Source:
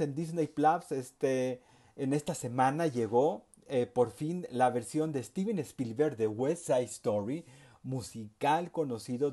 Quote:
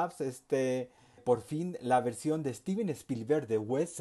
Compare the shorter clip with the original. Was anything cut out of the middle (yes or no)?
yes